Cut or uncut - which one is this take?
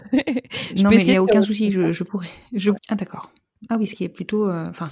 cut